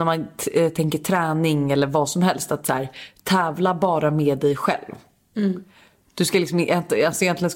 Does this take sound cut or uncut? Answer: uncut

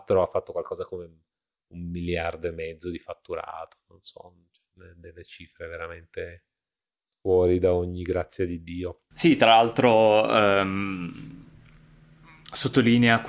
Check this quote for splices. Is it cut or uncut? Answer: uncut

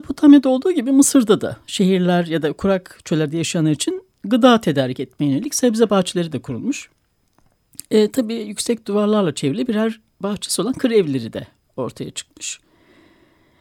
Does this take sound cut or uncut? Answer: uncut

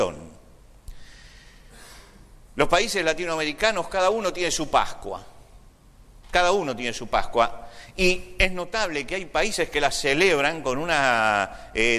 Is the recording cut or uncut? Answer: uncut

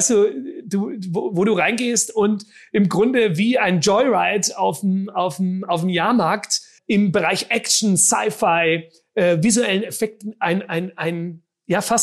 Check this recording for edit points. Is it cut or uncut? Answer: cut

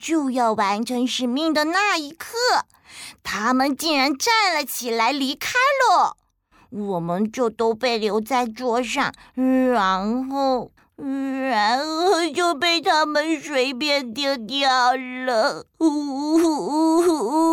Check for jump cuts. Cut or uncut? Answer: uncut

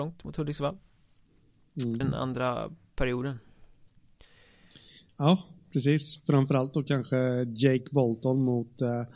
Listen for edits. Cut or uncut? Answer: cut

